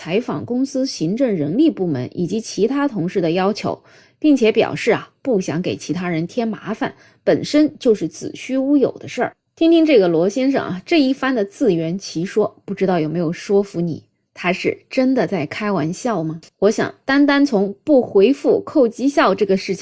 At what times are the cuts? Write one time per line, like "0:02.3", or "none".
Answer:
none